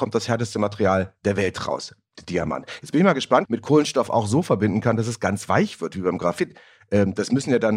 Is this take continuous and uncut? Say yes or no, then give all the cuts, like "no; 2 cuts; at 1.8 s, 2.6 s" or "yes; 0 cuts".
no; 1 cut; at 3.5 s